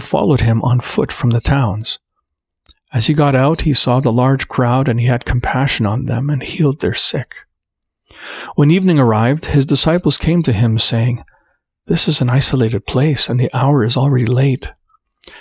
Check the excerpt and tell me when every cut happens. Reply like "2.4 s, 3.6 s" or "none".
none